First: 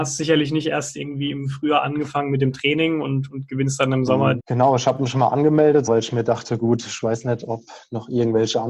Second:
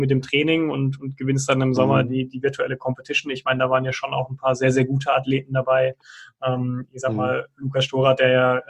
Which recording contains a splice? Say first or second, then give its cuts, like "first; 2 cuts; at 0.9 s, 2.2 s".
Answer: first; 2 cuts; at 4.4 s, 5.9 s